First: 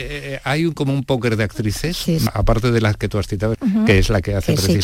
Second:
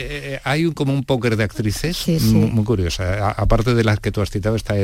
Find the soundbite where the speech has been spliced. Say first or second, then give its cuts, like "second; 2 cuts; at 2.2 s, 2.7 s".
first; 2 cuts; at 2.3 s, 3.5 s